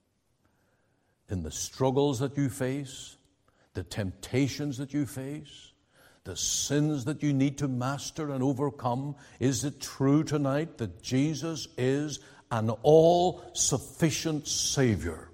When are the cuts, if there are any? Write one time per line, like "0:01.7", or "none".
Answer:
none